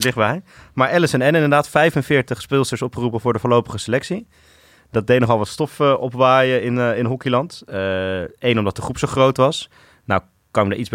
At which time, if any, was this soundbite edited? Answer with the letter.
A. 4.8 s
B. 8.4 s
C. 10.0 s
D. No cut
D